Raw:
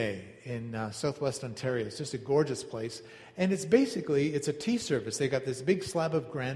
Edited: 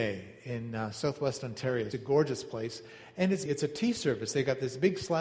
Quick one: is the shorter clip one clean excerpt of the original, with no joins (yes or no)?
no